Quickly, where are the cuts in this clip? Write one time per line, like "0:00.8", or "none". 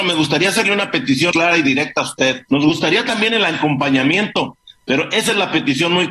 0:01.3
0:02.5